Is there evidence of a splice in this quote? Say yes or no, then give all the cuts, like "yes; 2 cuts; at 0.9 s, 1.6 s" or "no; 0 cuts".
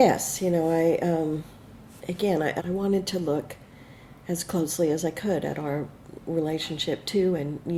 yes; 1 cut; at 2.6 s